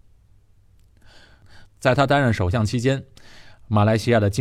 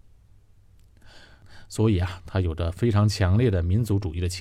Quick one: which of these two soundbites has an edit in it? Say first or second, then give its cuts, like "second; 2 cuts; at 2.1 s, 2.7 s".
first; 1 cut; at 1.7 s